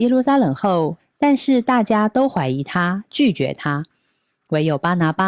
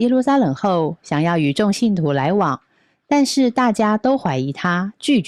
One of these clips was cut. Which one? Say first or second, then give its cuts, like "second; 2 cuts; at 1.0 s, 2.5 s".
first; 1 cut; at 1.0 s